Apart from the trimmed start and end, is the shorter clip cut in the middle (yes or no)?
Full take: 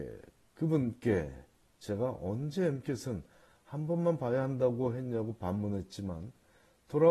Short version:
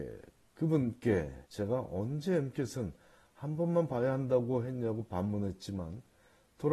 yes